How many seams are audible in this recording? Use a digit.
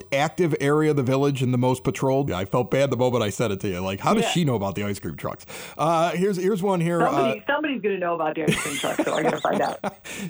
1